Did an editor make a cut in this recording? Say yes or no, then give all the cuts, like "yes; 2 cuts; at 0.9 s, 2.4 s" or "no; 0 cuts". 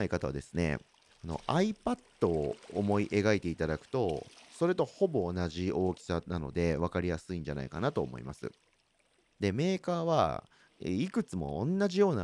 yes; 1 cut; at 9.3 s